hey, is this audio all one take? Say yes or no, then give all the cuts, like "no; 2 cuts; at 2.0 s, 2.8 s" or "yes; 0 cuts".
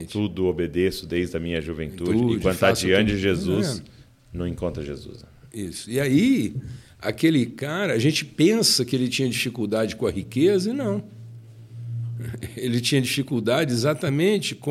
yes; 0 cuts